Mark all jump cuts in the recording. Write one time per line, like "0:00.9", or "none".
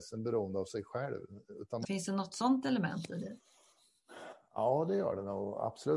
0:01.8